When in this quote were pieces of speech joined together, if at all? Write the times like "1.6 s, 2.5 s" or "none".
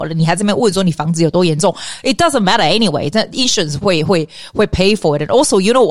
3.8 s